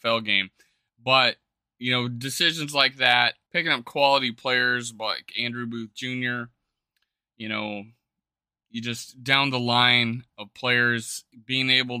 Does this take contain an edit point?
yes; 1 cut; at 3.5 s

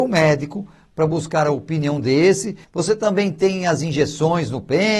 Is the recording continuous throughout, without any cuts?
no; 1 cut; at 2.6 s

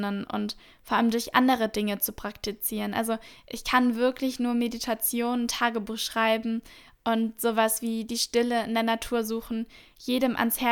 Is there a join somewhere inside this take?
no; 0 cuts

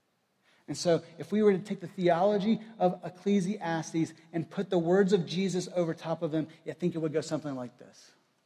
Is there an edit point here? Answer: no; 0 cuts

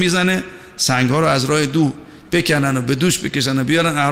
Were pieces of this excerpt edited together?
no; 0 cuts

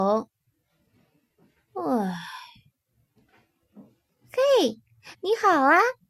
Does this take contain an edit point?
yes; 2 cuts; at 4.1 s, 5.1 s

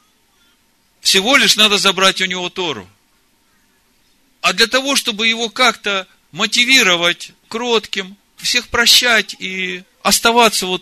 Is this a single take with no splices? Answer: no; 1 cut; at 7.4 s

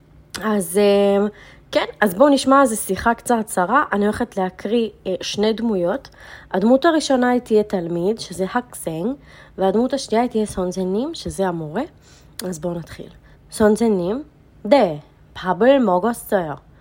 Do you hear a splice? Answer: yes; 1 cut; at 13.3 s

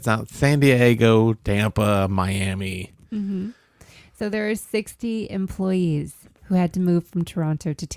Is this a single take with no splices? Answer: yes; 0 cuts

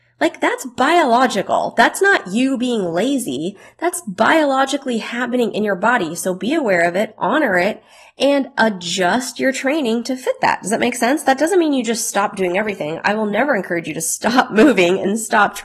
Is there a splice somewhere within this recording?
no; 0 cuts

